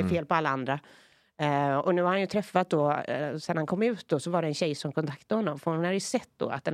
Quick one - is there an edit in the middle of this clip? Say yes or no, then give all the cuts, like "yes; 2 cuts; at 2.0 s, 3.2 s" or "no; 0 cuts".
no; 0 cuts